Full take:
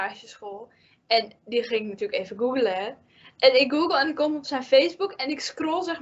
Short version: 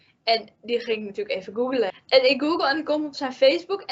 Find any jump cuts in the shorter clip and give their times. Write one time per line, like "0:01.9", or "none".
0:01.9